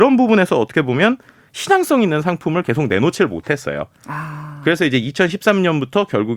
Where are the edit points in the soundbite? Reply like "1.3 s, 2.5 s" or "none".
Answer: none